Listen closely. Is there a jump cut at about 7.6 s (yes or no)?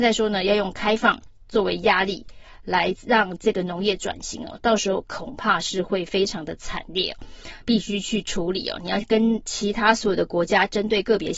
yes